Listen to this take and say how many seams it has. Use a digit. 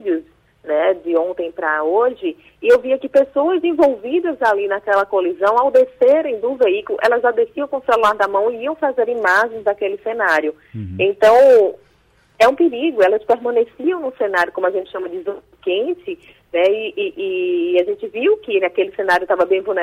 0